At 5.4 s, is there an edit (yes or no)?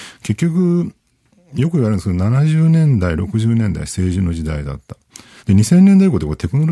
yes